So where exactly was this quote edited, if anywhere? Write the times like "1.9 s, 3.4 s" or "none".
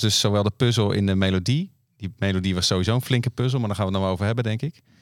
none